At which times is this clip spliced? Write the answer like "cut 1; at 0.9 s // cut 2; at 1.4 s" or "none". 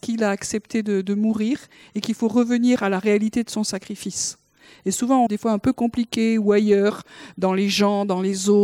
cut 1; at 5.3 s